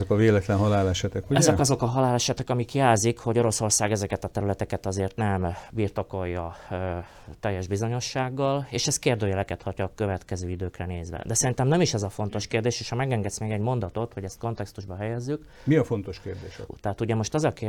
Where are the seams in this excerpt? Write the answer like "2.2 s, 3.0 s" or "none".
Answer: 16.7 s